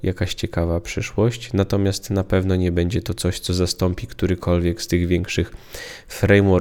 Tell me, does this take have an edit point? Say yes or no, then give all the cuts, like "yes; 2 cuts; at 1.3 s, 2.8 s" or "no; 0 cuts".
no; 0 cuts